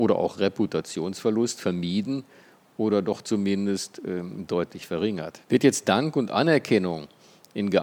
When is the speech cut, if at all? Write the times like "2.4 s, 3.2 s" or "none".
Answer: 5.4 s